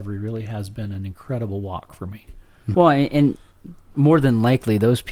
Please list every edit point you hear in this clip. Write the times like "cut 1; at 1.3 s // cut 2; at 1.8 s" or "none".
cut 1; at 2.7 s // cut 2; at 3.9 s